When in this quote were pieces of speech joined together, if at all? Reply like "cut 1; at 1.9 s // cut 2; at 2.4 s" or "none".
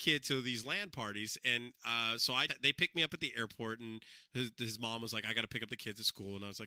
cut 1; at 2.5 s